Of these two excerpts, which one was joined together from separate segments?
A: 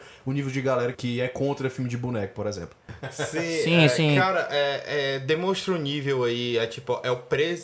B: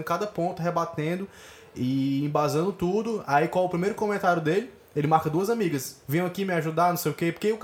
A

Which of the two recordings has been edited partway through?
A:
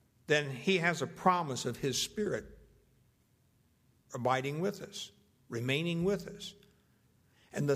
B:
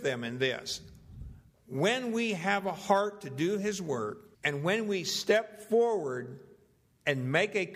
B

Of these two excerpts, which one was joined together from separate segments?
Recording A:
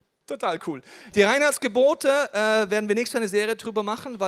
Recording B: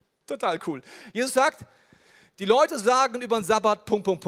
A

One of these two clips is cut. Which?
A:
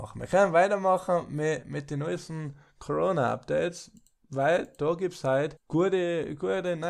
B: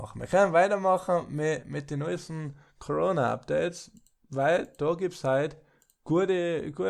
A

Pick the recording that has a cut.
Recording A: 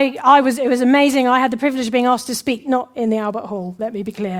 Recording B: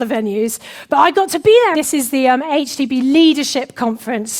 B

